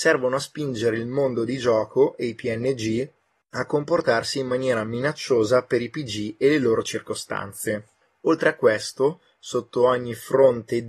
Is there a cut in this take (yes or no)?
no